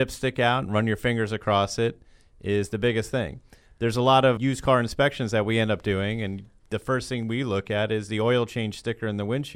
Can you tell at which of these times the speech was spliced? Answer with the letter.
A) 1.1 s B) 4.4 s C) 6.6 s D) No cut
B